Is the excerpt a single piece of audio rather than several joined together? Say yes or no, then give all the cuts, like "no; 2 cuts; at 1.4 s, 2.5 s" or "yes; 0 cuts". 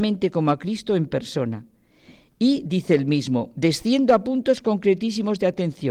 yes; 0 cuts